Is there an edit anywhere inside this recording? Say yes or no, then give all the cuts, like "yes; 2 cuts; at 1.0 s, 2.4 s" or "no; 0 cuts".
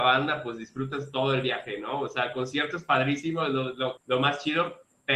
yes; 1 cut; at 4.0 s